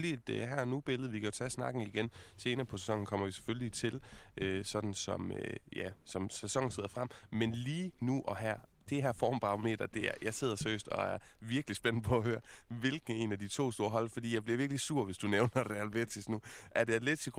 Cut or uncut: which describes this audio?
uncut